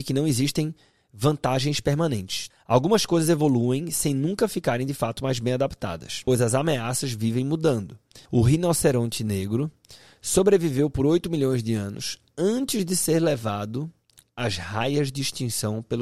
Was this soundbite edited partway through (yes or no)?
yes